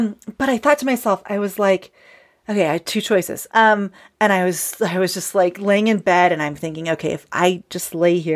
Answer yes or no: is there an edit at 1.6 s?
no